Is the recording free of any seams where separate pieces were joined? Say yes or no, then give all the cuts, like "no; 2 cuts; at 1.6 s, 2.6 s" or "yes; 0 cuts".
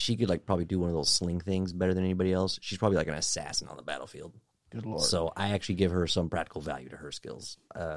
yes; 0 cuts